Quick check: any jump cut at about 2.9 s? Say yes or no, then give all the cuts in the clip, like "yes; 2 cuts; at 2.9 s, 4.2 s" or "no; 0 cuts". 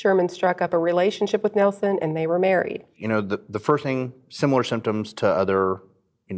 yes; 1 cut; at 2.9 s